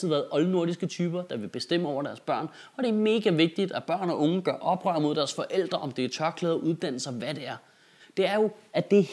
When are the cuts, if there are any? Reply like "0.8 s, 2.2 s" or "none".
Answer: 8.0 s